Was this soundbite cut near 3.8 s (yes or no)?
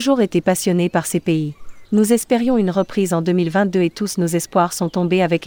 no